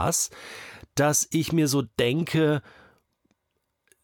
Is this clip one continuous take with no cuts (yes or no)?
yes